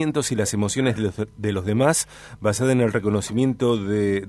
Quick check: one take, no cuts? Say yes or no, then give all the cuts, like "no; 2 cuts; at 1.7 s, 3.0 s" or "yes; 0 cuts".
yes; 0 cuts